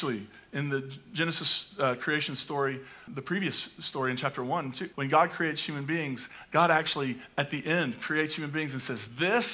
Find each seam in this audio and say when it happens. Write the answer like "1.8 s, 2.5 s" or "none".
3.1 s, 4.9 s